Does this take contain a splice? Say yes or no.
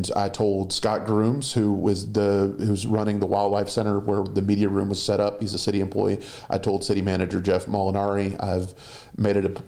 no